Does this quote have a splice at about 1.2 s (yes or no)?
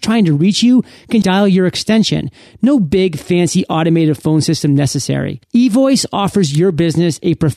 yes